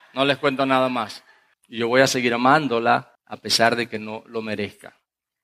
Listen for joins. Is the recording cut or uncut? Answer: cut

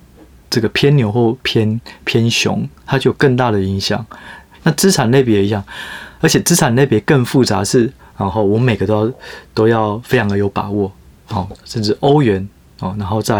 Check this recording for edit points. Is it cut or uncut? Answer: cut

